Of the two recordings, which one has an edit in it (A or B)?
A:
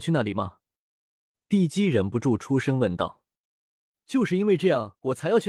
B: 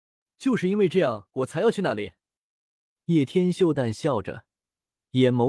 B